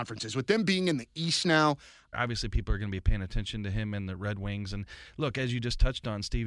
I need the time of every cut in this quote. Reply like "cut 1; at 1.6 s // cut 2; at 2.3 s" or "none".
cut 1; at 2.1 s